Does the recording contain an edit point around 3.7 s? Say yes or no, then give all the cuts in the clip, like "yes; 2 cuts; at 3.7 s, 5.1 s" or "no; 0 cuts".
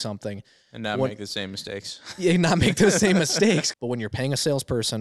yes; 1 cut; at 3.7 s